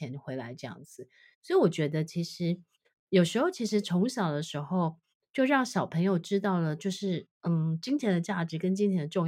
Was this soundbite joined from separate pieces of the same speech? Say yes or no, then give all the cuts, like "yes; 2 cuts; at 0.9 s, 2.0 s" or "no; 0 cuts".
no; 0 cuts